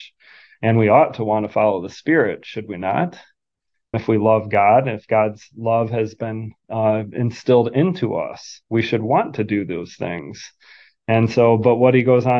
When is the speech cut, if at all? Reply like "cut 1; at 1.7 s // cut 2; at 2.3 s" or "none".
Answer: cut 1; at 3.9 s